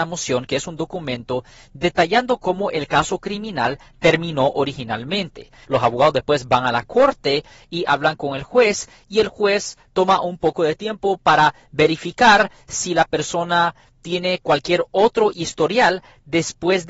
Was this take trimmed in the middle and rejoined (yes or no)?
yes